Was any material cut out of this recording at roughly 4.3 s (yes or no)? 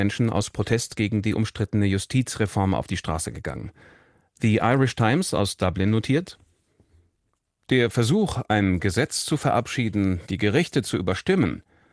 no